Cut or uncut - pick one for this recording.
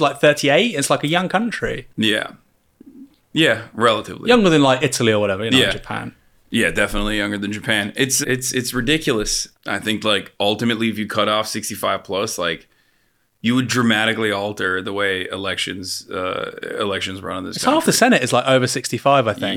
cut